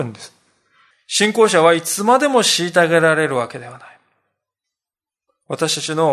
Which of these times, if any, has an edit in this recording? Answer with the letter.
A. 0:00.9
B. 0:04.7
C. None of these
A